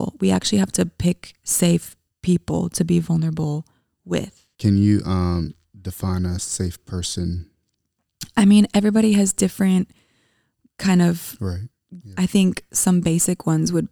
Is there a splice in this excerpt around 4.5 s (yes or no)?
yes